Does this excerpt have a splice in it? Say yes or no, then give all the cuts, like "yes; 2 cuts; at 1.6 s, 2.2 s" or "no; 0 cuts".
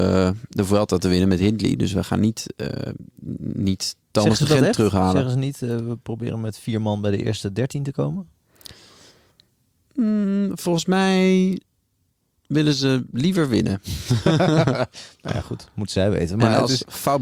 no; 0 cuts